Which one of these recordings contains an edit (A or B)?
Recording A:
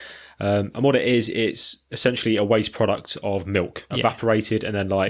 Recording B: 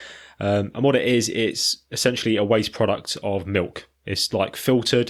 A